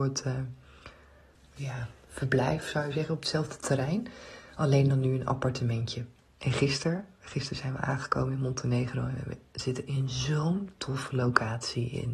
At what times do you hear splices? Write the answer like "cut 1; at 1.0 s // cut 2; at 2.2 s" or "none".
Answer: cut 1; at 1.3 s // cut 2; at 6.3 s